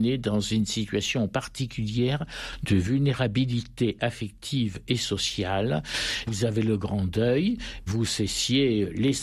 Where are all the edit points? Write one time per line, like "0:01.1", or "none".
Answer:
0:06.2